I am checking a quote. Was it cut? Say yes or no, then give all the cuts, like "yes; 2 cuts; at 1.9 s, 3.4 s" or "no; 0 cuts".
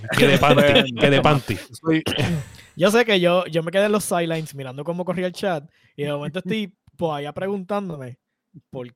no; 0 cuts